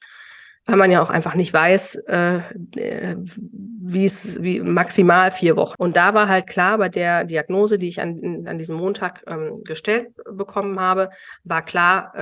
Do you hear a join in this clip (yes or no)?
yes